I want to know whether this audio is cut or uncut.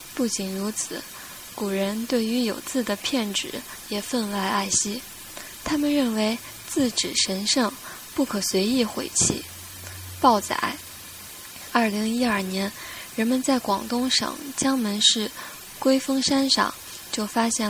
uncut